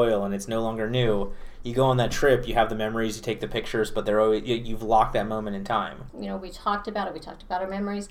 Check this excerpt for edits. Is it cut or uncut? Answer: cut